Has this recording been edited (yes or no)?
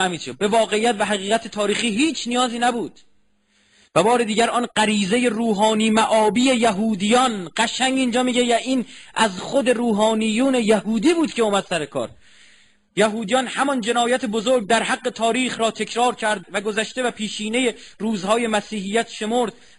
yes